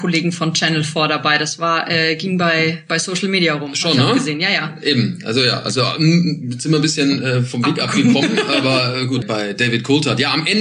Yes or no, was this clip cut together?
yes